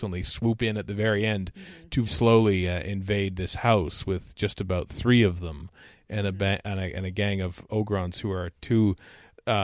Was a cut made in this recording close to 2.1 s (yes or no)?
yes